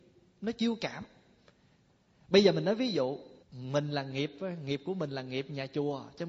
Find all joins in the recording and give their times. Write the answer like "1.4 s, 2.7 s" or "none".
3.4 s